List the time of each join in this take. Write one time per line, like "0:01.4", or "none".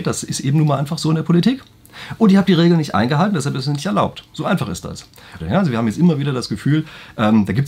0:05.4